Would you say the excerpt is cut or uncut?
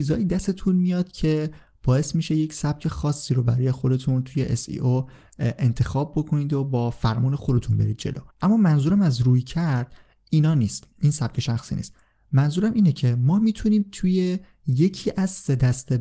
cut